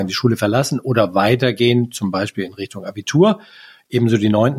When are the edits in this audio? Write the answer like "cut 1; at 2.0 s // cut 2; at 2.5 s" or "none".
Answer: none